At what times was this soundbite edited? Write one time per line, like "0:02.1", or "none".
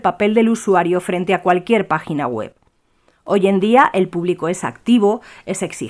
none